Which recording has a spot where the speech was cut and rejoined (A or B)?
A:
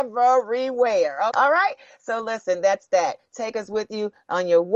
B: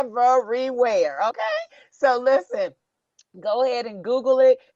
A